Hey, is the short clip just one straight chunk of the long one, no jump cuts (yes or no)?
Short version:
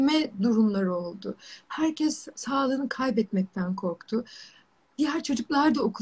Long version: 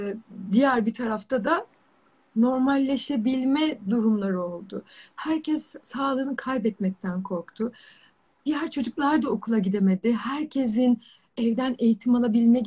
yes